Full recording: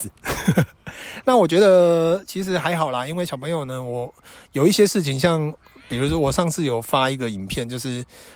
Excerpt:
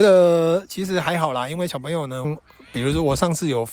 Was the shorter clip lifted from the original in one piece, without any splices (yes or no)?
no